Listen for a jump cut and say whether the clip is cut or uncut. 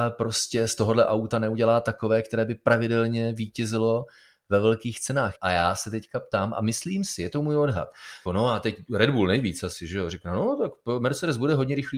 cut